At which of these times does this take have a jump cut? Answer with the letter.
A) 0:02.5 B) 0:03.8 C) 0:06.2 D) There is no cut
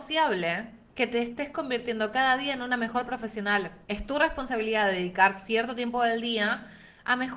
B